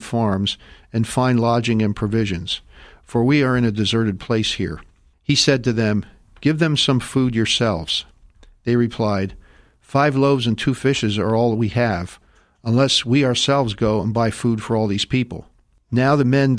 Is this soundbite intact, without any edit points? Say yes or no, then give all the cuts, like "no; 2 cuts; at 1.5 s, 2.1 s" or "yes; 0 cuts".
yes; 0 cuts